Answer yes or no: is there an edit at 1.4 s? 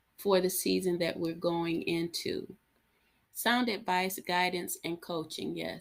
no